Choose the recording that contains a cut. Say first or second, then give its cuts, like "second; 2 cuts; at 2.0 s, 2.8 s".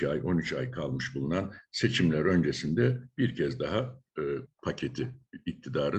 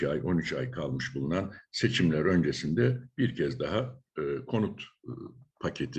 first; 1 cut; at 4.5 s